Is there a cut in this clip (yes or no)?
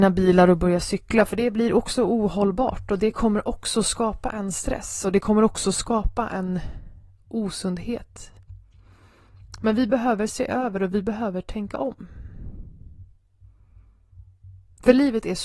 no